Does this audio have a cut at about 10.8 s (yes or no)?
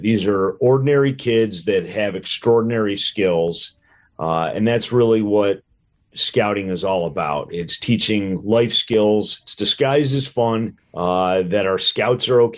yes